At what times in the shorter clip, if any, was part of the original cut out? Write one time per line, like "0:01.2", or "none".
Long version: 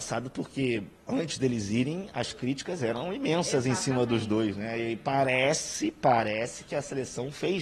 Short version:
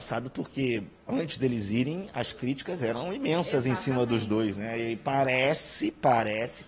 none

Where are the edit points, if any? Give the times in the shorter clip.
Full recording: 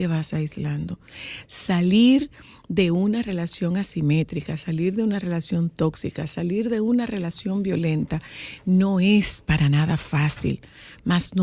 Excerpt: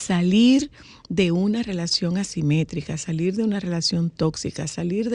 none

